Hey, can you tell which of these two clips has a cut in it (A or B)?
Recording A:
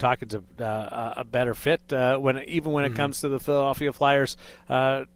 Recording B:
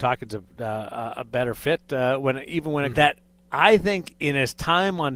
B